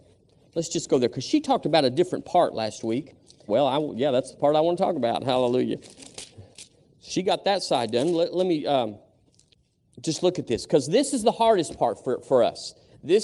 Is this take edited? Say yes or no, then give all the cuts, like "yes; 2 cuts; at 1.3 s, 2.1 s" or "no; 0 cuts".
yes; 1 cut; at 3.5 s